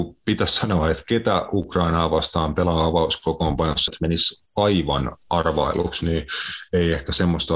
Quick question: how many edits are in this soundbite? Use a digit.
1